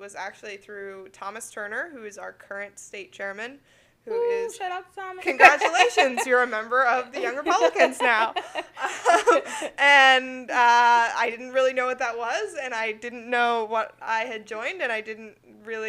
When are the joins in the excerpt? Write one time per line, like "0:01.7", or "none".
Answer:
0:05.2

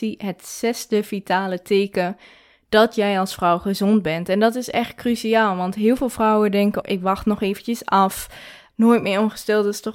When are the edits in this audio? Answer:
0:06.8
0:08.7

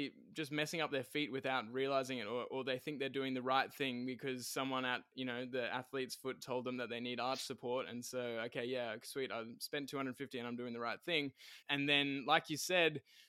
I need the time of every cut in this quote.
0:11.6

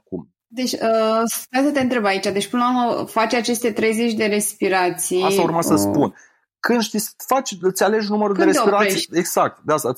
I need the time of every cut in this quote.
none

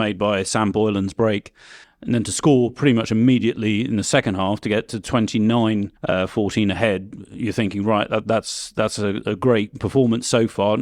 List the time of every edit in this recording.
0:01.8
0:06.0
0:09.2

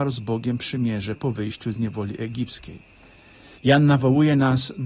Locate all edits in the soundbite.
0:03.6

